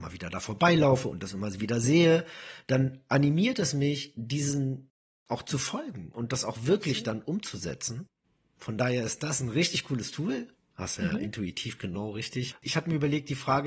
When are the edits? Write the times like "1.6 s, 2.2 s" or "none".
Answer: none